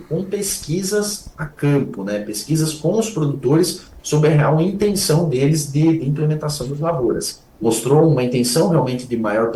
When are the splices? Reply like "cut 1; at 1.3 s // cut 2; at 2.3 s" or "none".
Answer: cut 1; at 7.5 s